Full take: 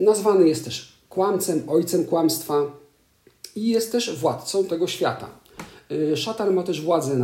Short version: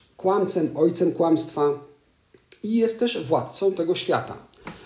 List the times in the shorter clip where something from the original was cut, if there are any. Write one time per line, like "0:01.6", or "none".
none